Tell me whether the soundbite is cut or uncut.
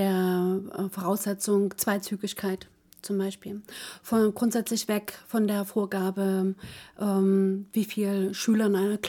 uncut